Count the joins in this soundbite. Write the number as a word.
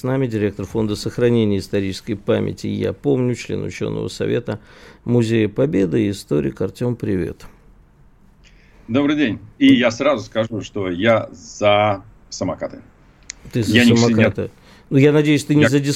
zero